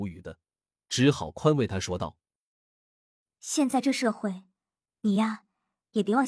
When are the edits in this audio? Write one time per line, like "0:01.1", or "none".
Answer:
0:04.8